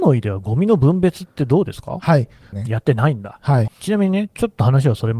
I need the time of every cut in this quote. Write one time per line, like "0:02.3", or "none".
0:02.5
0:03.7